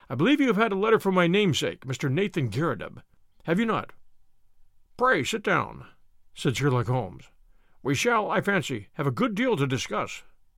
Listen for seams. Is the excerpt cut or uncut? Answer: uncut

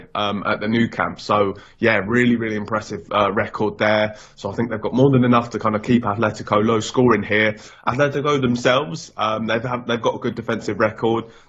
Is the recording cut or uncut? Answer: uncut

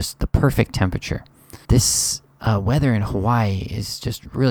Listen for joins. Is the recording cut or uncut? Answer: cut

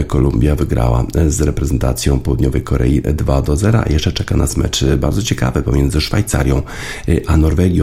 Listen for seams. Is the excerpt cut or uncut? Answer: uncut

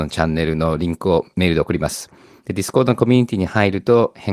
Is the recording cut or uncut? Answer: uncut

